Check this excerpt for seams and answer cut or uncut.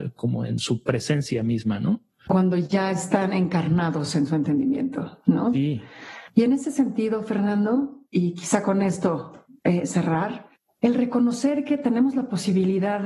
uncut